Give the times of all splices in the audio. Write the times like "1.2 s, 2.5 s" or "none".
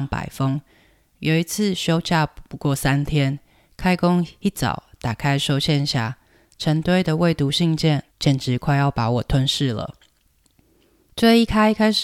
8.1 s